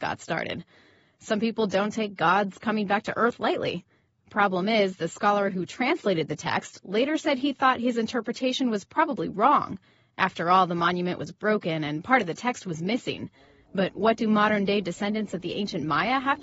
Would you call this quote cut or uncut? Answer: uncut